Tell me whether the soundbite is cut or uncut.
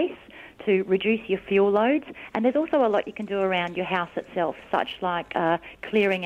uncut